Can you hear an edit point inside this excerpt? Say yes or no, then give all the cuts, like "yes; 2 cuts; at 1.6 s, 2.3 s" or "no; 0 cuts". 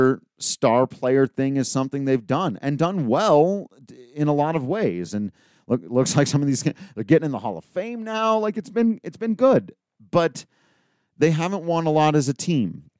no; 0 cuts